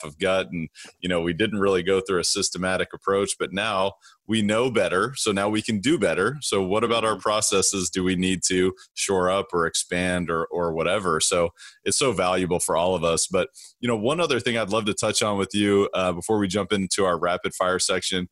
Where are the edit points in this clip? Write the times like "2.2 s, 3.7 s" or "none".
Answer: none